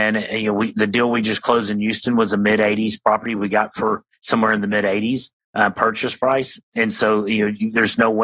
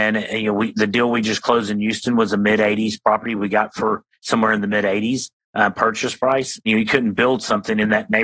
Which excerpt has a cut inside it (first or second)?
second